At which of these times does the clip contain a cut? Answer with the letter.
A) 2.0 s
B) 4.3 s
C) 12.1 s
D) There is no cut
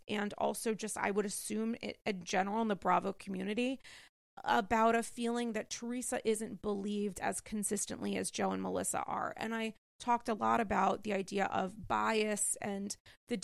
D